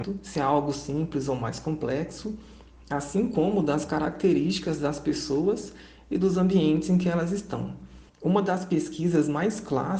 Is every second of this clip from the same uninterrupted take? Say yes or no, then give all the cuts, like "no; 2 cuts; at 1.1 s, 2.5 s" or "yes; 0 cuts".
no; 1 cut; at 8.1 s